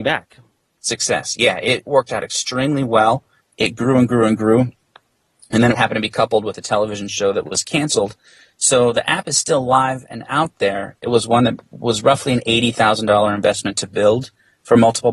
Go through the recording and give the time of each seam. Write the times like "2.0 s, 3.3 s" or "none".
none